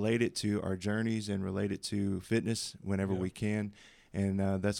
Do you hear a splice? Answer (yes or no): no